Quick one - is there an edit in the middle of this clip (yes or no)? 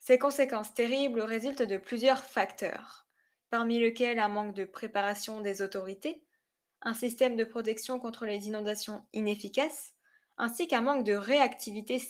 no